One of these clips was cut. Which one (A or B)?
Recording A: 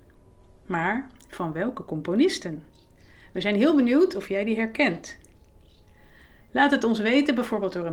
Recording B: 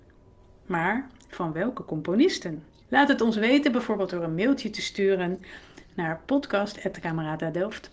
B